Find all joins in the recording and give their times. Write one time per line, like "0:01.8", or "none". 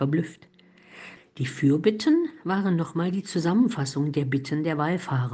0:01.2